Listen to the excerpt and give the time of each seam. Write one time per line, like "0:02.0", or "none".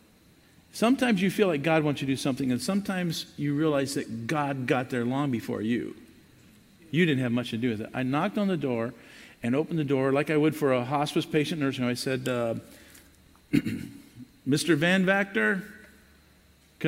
none